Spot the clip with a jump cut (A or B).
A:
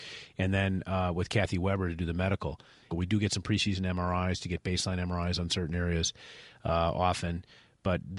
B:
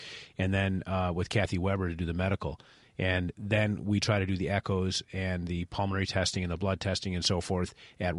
A